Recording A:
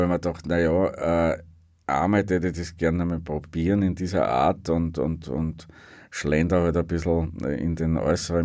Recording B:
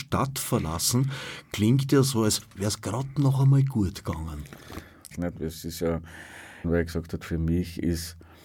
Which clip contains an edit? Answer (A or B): B